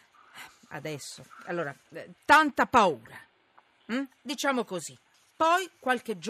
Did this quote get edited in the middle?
yes; 1 cut; at 2.1 s

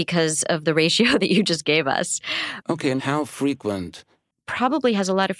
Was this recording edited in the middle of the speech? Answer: yes; 2 cuts; at 2.6 s, 4.3 s

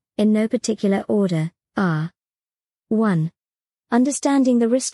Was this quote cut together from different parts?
yes; 1 cut; at 3.7 s

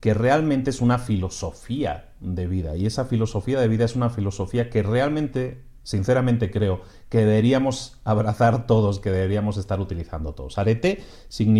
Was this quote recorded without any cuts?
yes; 0 cuts

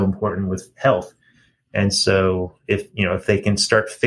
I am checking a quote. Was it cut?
no; 0 cuts

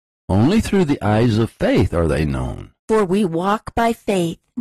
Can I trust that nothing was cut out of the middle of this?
no; 1 cut; at 2.8 s

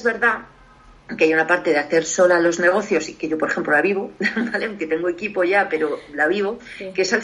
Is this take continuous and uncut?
yes; 0 cuts

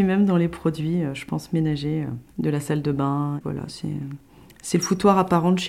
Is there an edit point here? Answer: yes; 2 cuts; at 2.3 s, 3.4 s

